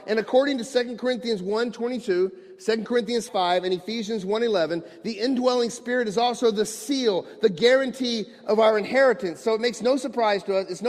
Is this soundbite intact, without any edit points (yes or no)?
no